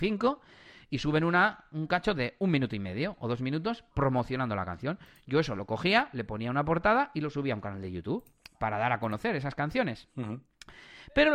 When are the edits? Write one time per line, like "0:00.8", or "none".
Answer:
none